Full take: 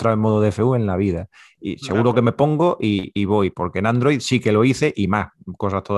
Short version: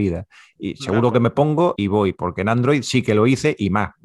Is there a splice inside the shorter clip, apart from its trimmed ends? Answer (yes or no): yes